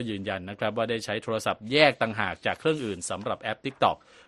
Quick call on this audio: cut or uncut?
uncut